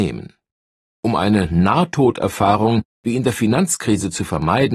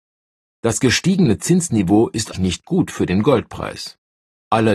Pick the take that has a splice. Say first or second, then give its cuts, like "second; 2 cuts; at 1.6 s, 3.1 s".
second; 1 cut; at 2.3 s